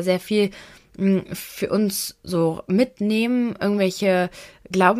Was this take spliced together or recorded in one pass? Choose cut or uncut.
uncut